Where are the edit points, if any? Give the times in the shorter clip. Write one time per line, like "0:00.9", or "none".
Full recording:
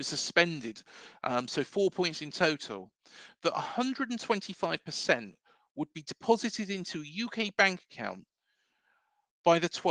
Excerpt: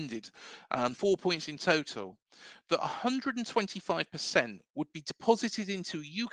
0:00.9
0:04.7